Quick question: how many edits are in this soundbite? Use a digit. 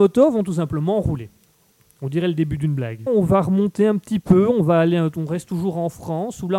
1